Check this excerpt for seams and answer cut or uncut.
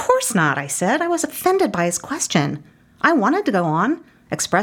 uncut